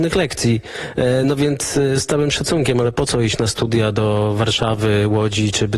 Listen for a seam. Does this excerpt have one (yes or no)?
no